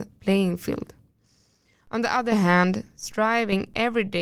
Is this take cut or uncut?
uncut